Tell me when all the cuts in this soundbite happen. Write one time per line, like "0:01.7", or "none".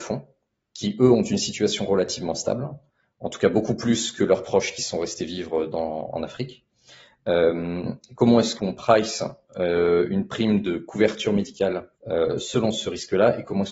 0:08.6
0:12.0